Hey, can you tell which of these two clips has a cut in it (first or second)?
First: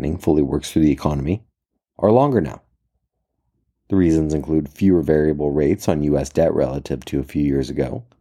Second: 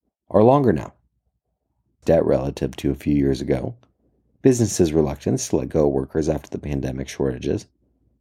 second